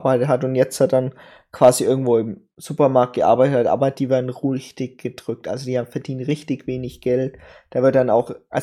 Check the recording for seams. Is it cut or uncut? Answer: uncut